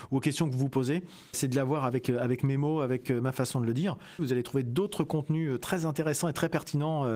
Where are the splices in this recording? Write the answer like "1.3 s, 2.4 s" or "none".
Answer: 1.3 s, 4.2 s